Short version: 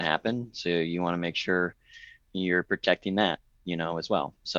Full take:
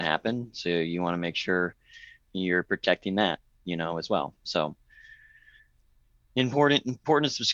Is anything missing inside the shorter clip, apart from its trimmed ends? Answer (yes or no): no